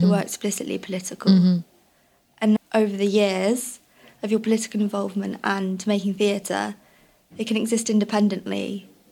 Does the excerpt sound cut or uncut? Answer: cut